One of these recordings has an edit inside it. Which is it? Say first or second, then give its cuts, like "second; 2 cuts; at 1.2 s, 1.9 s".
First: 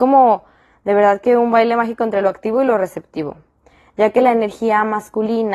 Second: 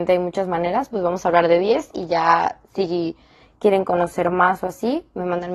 second; 2 cuts; at 0.9 s, 2.6 s